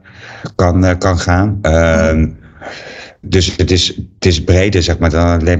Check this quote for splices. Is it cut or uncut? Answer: cut